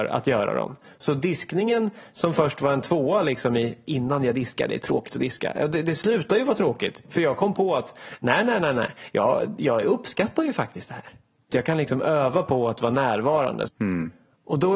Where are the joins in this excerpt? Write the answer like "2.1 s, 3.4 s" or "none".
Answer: 11.5 s, 13.7 s